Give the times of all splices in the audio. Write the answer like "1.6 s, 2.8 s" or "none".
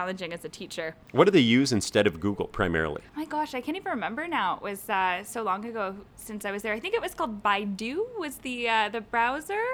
3.1 s